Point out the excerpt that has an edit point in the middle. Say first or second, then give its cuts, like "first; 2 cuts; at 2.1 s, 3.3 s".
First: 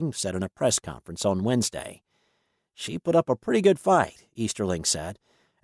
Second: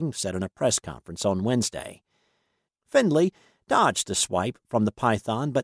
second; 1 cut; at 2.7 s